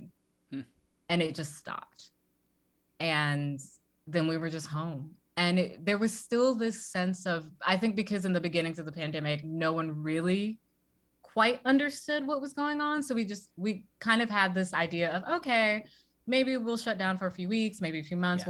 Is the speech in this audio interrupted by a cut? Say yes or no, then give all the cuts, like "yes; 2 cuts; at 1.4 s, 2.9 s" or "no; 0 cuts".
no; 0 cuts